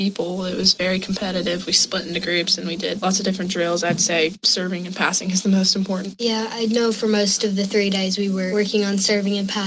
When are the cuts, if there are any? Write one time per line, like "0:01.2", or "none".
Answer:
none